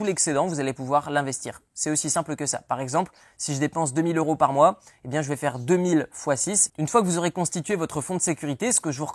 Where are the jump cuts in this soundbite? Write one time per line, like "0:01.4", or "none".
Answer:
0:06.7